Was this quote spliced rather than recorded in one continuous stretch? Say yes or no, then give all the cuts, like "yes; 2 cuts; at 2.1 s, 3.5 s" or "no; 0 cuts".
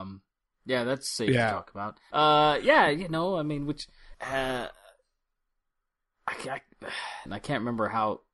yes; 3 cuts; at 2.1 s, 4.1 s, 7.3 s